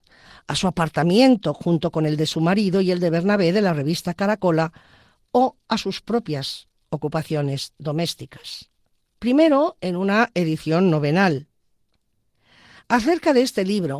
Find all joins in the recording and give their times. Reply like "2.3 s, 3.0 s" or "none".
9.2 s